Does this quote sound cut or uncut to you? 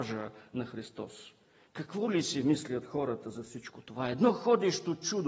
uncut